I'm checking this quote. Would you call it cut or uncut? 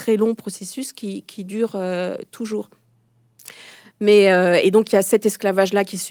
uncut